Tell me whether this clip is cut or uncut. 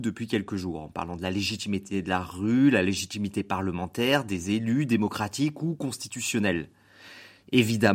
uncut